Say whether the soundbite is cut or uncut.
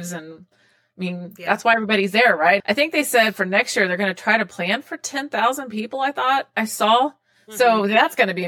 cut